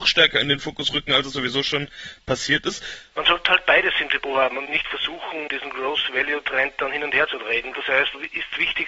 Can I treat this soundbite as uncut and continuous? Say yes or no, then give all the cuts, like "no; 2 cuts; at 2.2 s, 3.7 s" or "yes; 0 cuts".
no; 2 cuts; at 3.1 s, 7.7 s